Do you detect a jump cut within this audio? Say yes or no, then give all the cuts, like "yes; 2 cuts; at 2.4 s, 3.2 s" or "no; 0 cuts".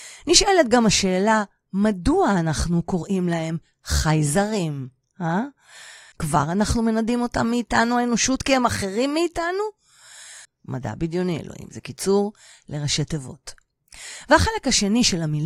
yes; 2 cuts; at 6.1 s, 10.4 s